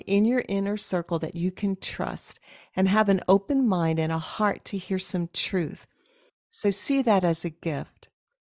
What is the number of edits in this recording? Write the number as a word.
one